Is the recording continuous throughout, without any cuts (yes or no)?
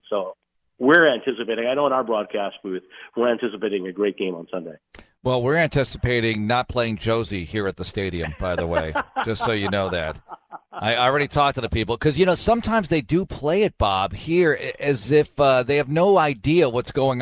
yes